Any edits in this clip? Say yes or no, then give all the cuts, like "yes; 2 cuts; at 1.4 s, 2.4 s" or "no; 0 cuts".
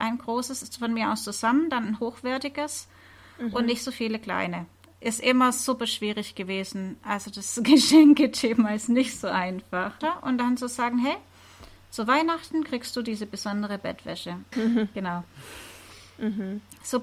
yes; 2 cuts; at 10.0 s, 14.5 s